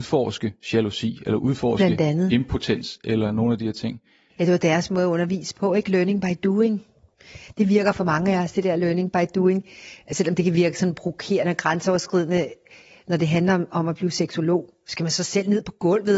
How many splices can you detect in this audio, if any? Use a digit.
0